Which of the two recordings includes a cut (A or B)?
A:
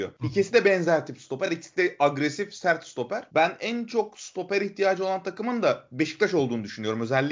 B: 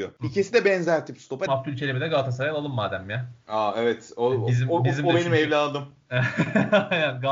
B